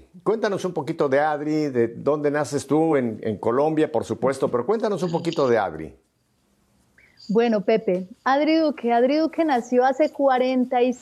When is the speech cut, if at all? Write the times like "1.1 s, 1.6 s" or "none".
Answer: none